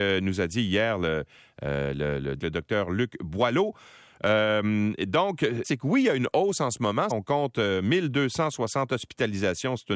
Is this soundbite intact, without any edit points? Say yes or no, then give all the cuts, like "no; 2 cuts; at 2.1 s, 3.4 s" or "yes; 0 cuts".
no; 3 cuts; at 2.4 s, 5.6 s, 7.1 s